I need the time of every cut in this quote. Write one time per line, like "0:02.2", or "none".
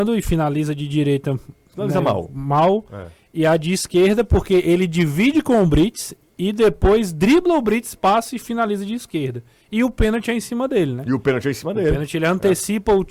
none